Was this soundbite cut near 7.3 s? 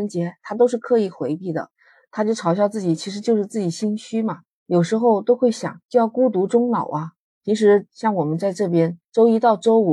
yes; 3 cuts; at 4.6 s, 5.8 s, 7.3 s

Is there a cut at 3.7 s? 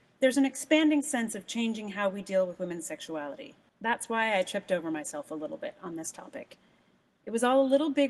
yes; 1 cut; at 3.7 s

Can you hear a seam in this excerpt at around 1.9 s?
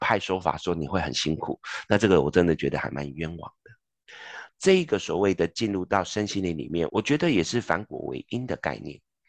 no; 2 cuts; at 4.5 s, 6.9 s

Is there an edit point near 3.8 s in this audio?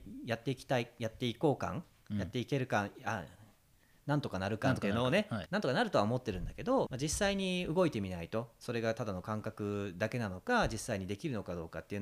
no; 2 cuts; at 5.5 s, 6.9 s

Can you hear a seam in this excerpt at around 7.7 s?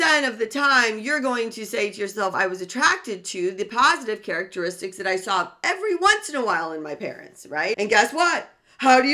yes; 2 cuts; at 2.3 s, 7.7 s

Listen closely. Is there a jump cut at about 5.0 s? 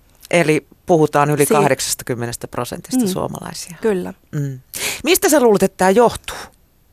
no; 0 cuts

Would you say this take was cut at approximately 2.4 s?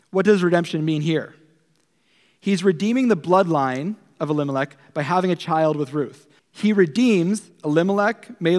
no; 1 cut; at 6.4 s

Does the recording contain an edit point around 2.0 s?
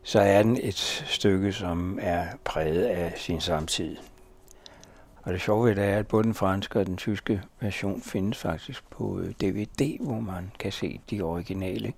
no; 1 cut; at 5.2 s

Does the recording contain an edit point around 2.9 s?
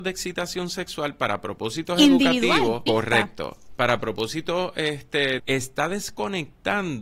yes; 2 cuts; at 2.9 s, 5.4 s

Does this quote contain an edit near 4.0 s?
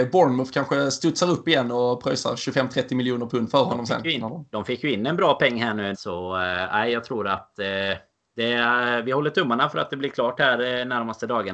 no; 1 cut; at 5.9 s

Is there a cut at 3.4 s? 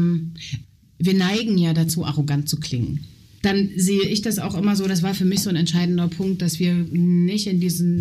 yes; 1 cut; at 3.4 s

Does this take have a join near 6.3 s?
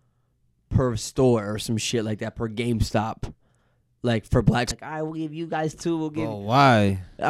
no; 1 cut; at 4.7 s

